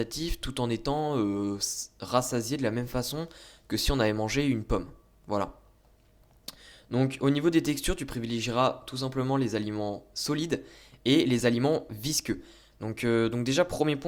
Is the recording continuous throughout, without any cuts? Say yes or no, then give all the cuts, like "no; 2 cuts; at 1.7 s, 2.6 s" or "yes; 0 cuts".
no; 1 cut; at 12.7 s